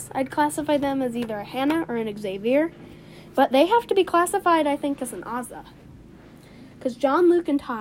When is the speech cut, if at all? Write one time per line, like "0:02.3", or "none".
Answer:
none